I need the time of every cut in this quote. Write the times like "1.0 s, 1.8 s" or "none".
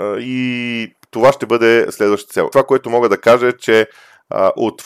2.5 s